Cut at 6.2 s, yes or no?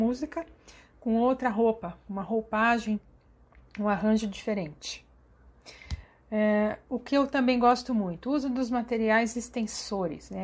no